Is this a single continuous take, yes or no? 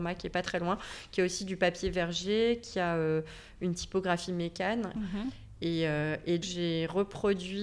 no